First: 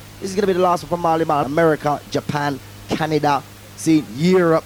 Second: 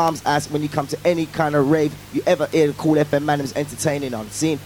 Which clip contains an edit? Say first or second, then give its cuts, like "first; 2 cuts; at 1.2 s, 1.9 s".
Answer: first; 1 cut; at 1.4 s